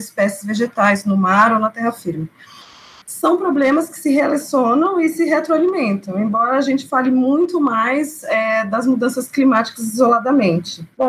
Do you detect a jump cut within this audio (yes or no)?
no